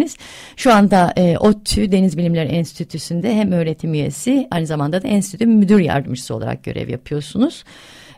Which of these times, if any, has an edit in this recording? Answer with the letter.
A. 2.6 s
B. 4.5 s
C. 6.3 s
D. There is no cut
B